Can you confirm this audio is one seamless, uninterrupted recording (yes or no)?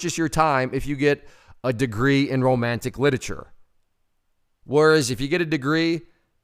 yes